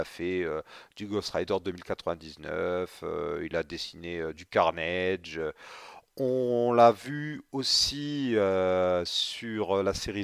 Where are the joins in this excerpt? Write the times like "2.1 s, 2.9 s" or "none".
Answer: none